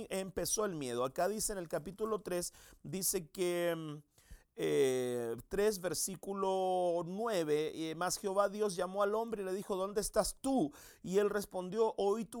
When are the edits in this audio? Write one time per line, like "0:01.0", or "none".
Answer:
none